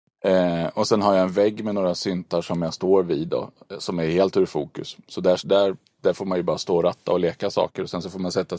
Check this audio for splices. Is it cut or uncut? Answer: uncut